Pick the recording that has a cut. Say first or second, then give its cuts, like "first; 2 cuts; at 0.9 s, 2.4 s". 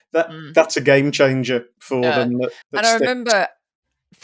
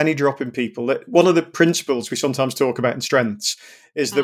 first; 1 cut; at 2.6 s